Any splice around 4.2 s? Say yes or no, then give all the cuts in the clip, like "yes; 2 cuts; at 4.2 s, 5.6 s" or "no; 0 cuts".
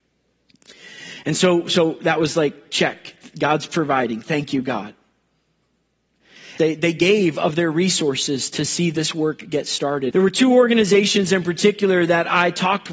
no; 2 cuts; at 6.6 s, 10.1 s